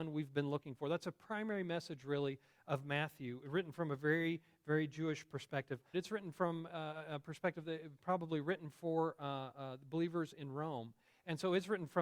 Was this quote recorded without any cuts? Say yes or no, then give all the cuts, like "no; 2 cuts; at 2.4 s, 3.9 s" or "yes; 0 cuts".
no; 1 cut; at 5.9 s